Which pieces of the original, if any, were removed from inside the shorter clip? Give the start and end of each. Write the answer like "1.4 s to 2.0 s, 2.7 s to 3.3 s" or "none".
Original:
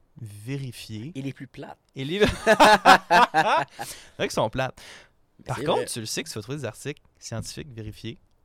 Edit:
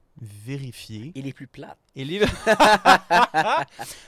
none